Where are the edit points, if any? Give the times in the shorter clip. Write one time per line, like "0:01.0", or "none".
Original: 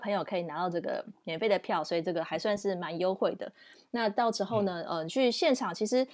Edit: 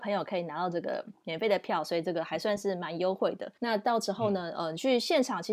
0:03.6